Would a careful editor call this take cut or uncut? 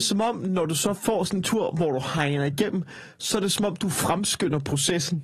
uncut